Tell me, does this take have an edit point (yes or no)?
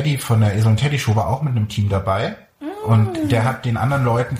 no